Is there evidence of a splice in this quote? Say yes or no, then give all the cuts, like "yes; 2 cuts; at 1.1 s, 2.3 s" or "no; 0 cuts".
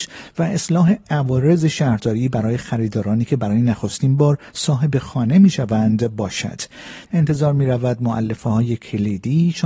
yes; 1 cut; at 7.1 s